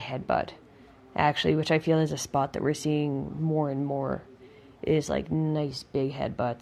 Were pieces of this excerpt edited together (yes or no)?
no